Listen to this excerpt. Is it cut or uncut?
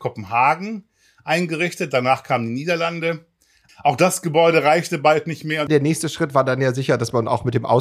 cut